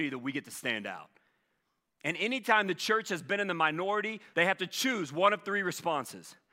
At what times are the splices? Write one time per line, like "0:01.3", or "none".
0:04.3